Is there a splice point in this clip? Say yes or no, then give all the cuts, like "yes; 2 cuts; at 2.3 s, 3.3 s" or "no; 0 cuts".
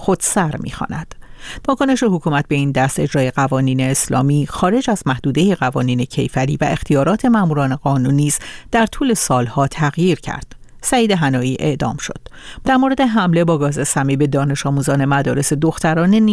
yes; 2 cuts; at 1.6 s, 12.6 s